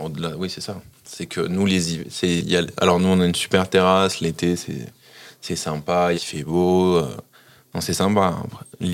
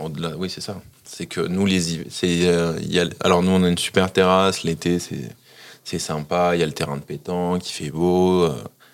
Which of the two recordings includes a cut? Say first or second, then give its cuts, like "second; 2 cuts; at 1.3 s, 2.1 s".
first; 2 cuts; at 2.4 s, 6.1 s